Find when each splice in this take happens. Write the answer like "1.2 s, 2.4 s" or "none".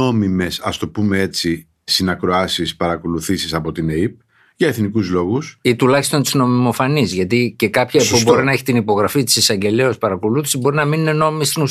none